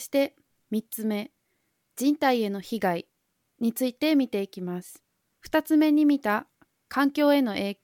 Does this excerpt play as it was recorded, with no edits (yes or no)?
no